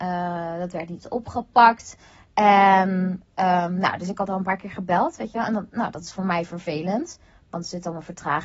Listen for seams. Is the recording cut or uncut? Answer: uncut